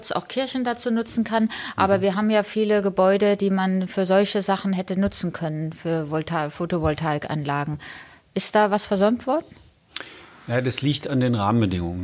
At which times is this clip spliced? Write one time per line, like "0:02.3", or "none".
none